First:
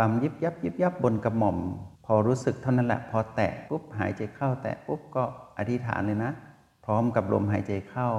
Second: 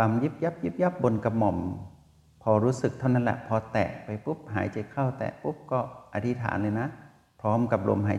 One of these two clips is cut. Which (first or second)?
first